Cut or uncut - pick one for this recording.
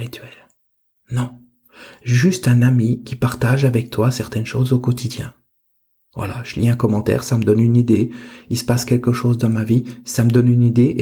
uncut